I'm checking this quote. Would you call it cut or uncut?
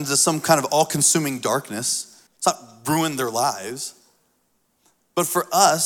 cut